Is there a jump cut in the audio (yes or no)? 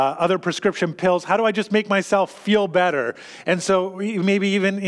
no